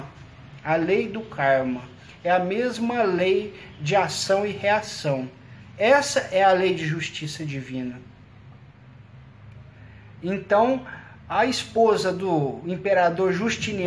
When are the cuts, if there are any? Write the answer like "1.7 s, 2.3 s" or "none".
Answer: none